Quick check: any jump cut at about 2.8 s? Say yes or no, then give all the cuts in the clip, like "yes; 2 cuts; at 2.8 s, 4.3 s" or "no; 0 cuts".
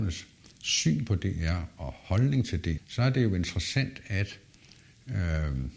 yes; 1 cut; at 2.8 s